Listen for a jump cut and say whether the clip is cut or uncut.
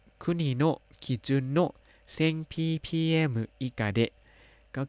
uncut